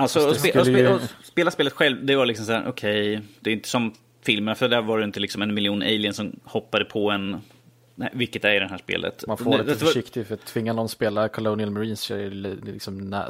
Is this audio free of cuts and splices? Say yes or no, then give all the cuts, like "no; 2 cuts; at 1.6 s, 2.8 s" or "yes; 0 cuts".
no; 1 cut; at 9.3 s